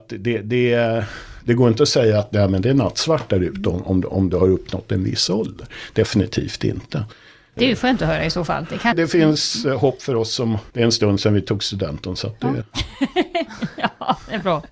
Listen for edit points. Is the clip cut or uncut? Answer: uncut